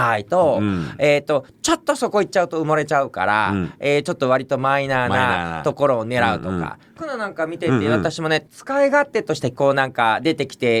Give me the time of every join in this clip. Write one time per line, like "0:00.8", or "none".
0:07.0
0:08.5
0:09.5